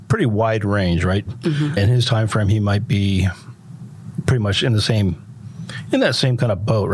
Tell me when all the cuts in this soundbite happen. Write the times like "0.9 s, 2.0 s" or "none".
1.3 s